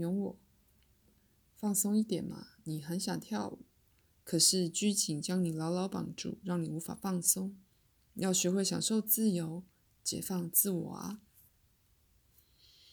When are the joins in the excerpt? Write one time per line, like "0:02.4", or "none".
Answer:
none